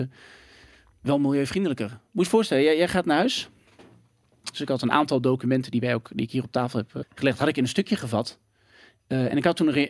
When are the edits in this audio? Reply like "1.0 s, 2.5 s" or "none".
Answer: 4.5 s, 7.0 s